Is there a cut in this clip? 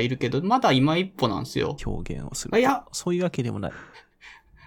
yes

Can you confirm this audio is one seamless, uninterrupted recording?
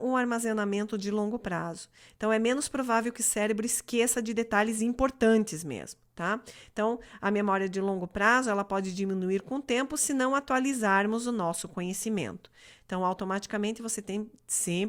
yes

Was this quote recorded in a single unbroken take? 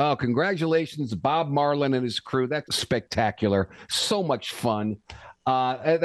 no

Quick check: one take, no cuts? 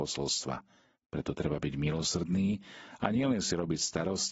no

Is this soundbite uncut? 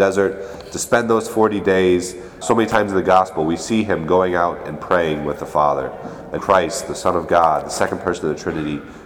no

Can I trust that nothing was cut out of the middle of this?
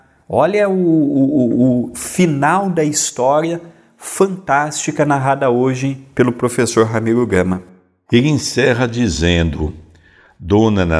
yes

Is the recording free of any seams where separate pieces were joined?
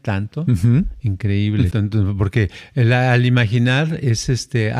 no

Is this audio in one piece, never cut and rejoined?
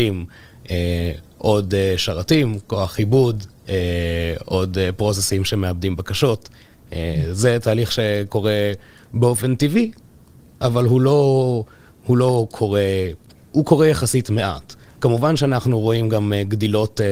yes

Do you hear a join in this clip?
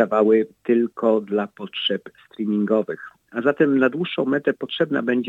no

